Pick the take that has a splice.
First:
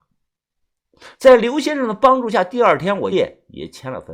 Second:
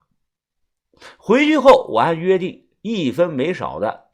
first; 2 cuts; at 1.1 s, 3.1 s

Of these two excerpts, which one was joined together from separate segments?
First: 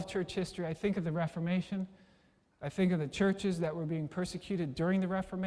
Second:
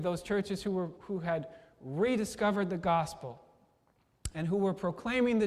second; 1 cut; at 1.0 s

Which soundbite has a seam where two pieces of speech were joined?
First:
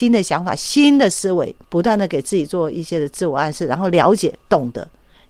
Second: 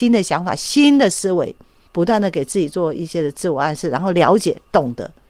first; 1 cut; at 1.6 s

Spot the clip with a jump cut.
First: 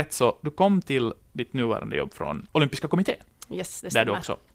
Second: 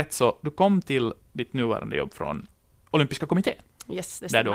first; 1 cut; at 2.5 s

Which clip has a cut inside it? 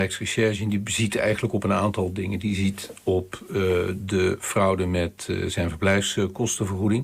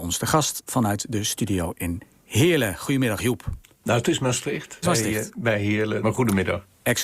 second; 2 cuts; at 4.8 s, 6.0 s

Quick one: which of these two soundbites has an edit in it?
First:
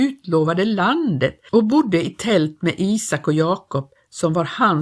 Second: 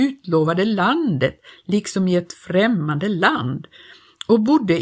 first; 1 cut; at 1.5 s

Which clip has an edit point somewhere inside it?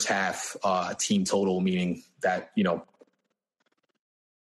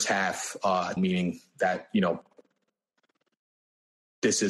second; 1 cut; at 1.0 s

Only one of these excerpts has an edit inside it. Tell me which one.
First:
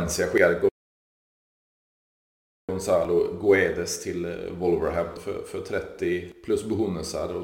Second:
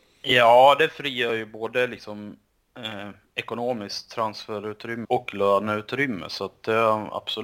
second; 1 cut; at 5.0 s

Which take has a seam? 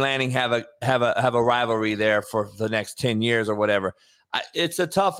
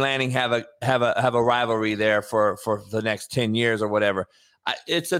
first; 1 cut; at 2.2 s

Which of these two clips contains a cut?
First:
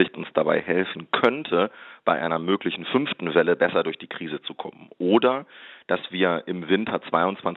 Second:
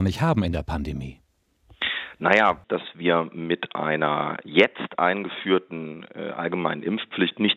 second; 1 cut; at 2.6 s

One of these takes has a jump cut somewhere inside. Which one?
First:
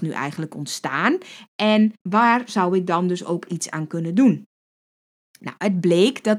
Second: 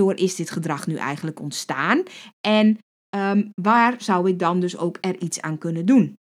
first; 2 cuts; at 2.0 s, 3.5 s

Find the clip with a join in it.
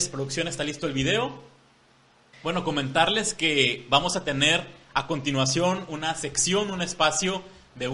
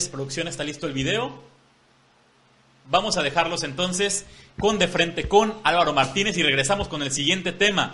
first; 1 cut; at 2.3 s

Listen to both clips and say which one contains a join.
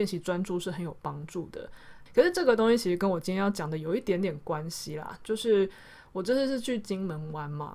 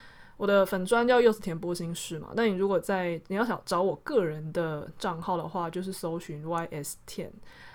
first; 1 cut; at 2.1 s

